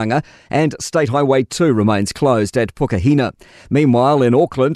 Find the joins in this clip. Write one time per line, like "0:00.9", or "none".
none